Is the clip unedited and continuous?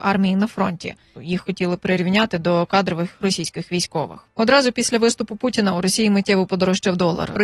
no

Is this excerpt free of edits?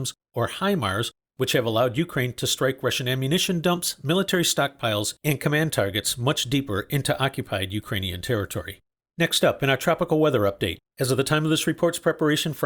yes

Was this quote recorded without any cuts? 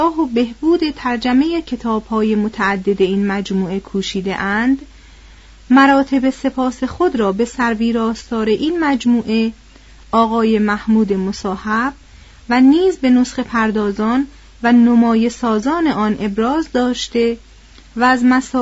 yes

